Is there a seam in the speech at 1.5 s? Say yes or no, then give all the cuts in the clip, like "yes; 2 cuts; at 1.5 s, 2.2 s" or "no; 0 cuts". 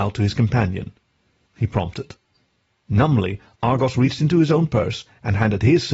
yes; 1 cut; at 1.5 s